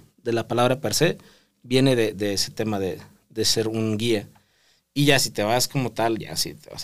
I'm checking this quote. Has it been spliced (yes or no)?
no